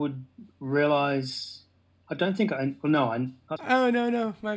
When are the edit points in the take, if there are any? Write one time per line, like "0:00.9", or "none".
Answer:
0:03.6